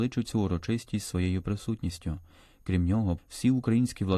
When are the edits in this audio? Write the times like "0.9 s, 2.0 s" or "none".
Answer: 3.2 s

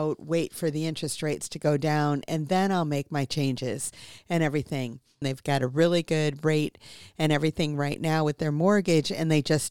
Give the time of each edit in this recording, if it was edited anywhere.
5.2 s

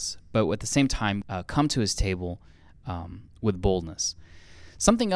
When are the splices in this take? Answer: 1.2 s

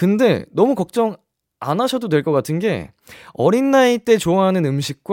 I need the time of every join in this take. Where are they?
none

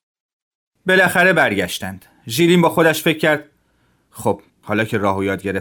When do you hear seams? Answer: 4.5 s

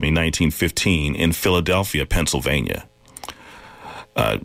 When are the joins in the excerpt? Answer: none

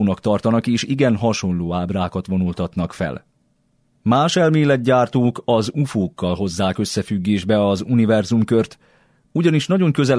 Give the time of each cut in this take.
3.9 s

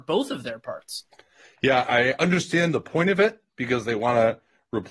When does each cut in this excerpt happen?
1.9 s

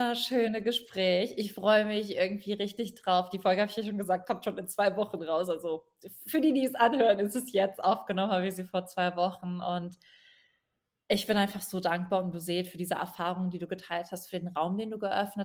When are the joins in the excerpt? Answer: none

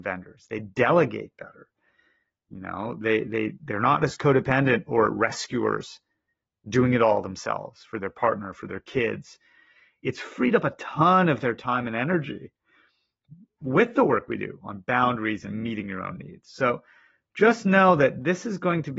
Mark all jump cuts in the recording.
none

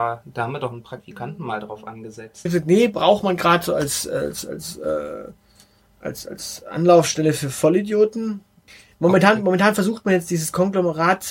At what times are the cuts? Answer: 2.4 s

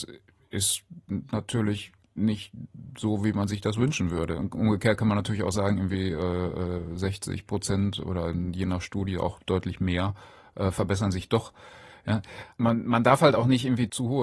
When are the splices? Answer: none

